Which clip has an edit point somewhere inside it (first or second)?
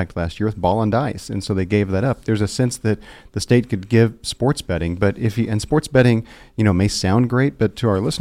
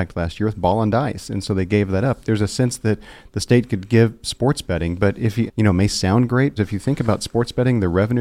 second